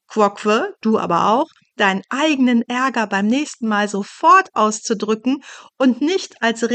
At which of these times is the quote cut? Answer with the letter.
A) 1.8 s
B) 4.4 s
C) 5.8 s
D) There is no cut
A